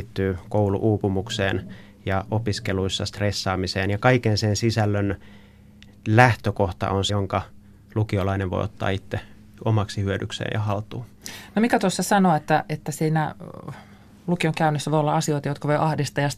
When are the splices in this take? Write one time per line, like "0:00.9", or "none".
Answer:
0:07.1